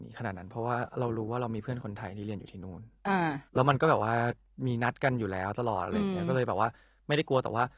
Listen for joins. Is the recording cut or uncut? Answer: cut